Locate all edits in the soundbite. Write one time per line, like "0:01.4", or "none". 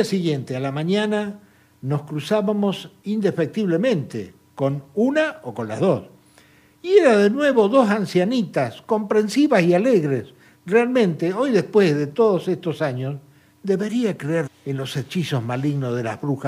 0:14.5